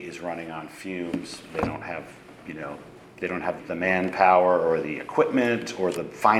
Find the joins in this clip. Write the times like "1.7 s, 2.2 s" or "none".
3.6 s